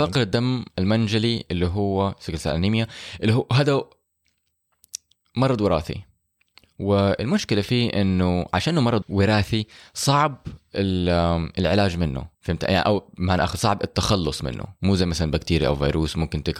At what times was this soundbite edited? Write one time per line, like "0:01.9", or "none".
0:09.0
0:12.3